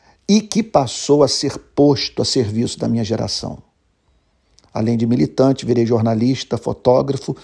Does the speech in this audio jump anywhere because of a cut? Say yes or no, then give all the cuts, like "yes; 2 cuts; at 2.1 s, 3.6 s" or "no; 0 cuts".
no; 0 cuts